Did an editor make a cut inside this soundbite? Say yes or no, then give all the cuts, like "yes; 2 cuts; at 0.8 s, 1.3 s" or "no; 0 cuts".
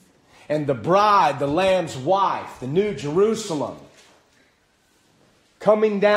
no; 0 cuts